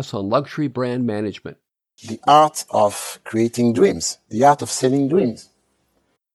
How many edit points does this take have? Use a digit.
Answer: 1